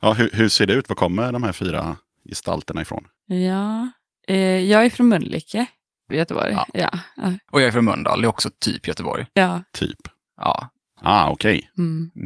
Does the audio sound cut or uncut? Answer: cut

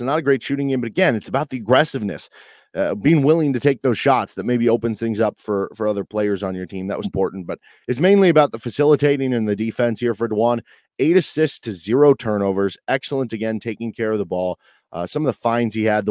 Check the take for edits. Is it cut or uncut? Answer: cut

